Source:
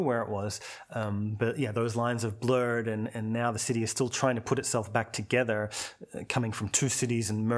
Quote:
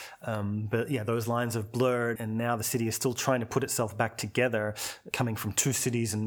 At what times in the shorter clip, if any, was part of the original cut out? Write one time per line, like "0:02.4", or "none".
0:02.2
0:05.1